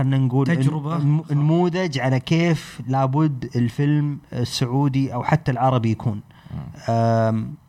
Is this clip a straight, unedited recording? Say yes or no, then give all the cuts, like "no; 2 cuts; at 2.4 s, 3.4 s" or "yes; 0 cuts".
no; 1 cut; at 4.3 s